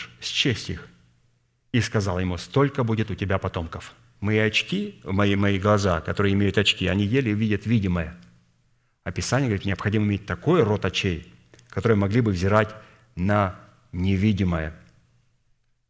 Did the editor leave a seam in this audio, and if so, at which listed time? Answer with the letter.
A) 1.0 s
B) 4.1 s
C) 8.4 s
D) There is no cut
B